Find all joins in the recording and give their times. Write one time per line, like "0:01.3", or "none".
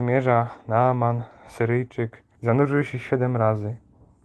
0:02.3